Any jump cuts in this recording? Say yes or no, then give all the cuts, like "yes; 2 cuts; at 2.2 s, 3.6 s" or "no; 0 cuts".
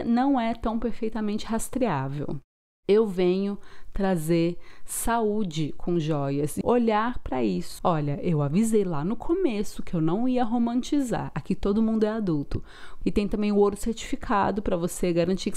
yes; 3 cuts; at 6.6 s, 7.8 s, 13.0 s